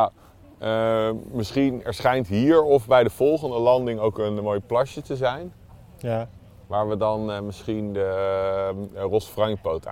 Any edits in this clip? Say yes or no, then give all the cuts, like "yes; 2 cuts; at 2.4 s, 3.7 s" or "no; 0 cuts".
no; 0 cuts